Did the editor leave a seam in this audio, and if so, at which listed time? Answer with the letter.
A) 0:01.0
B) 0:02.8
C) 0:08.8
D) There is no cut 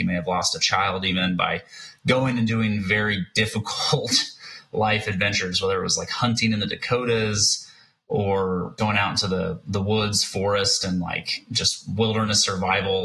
C